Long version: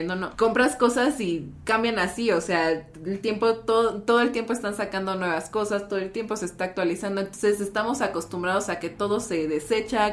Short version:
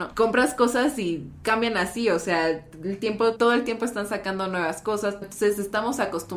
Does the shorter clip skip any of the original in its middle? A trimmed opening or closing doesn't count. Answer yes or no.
yes